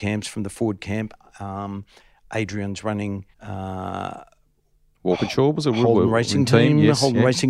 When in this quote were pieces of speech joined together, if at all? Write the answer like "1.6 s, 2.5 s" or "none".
3.3 s